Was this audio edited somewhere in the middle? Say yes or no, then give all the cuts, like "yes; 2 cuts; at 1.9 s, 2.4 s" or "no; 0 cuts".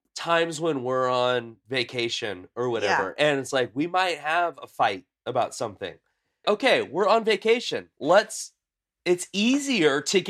yes; 1 cut; at 6.4 s